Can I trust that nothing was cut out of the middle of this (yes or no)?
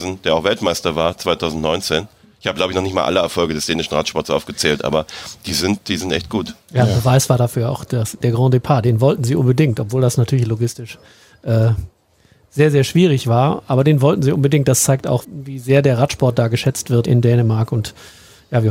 no